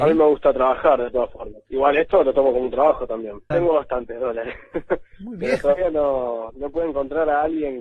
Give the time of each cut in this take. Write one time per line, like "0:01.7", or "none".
0:03.5